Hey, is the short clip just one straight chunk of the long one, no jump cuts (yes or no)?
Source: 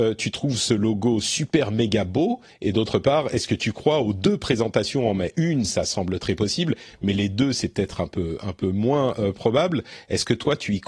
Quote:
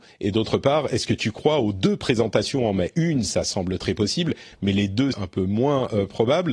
no